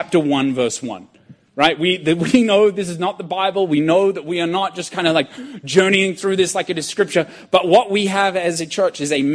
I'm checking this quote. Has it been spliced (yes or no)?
no